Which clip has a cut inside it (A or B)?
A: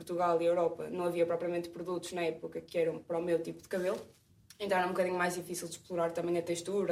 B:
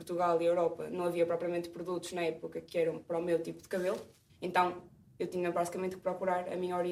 B